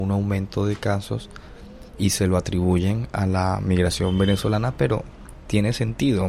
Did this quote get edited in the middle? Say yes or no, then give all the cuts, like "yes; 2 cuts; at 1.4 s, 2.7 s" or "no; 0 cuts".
no; 0 cuts